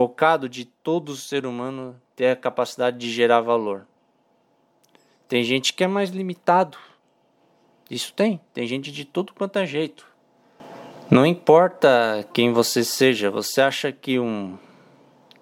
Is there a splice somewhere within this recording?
no; 0 cuts

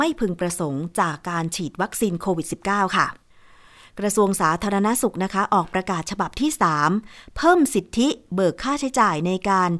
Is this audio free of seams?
yes; 0 cuts

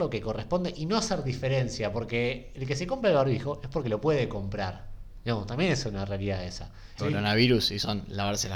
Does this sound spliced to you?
yes; 1 cut; at 7.0 s

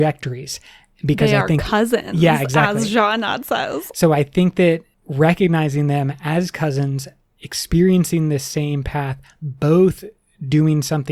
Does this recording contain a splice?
no; 0 cuts

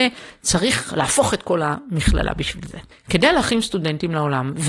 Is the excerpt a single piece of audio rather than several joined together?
no; 1 cut; at 2.9 s

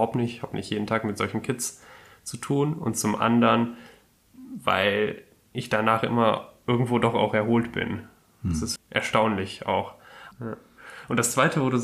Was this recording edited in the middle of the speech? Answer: yes; 2 cuts; at 8.8 s, 10.3 s

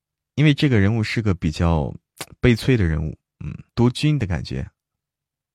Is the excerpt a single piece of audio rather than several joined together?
no; 1 cut; at 3.7 s

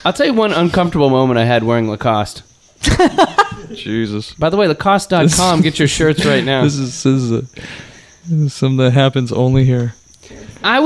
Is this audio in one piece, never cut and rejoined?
yes; 0 cuts

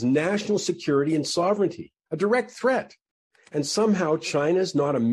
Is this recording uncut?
yes; 0 cuts

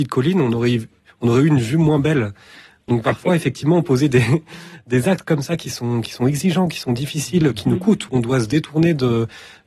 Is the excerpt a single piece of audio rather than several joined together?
yes; 0 cuts

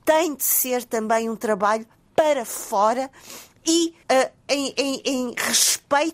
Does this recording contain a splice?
yes; 1 cut; at 4.0 s

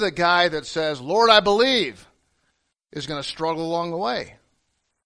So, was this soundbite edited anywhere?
no; 0 cuts

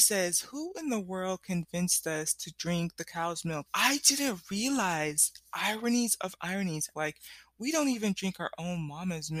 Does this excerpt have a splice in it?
yes; 2 cuts; at 3.7 s, 6.9 s

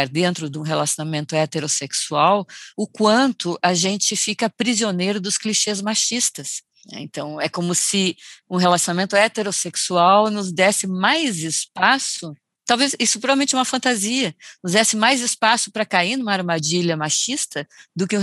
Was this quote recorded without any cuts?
no; 1 cut; at 6.8 s

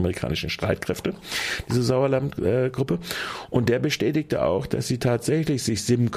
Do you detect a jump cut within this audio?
no; 0 cuts

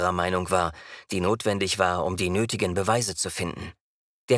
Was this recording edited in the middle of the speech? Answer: yes; 1 cut; at 1.1 s

